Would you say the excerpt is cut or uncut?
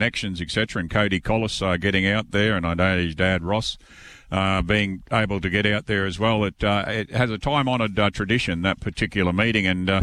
uncut